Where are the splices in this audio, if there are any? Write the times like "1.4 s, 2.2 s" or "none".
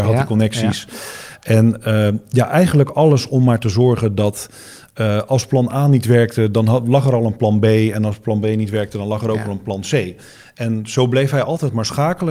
none